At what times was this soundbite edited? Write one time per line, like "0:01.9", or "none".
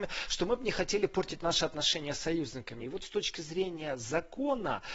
0:02.8

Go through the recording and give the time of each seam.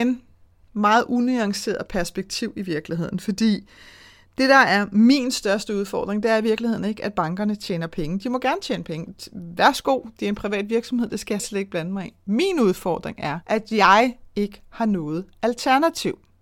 0:11.4
0:13.4

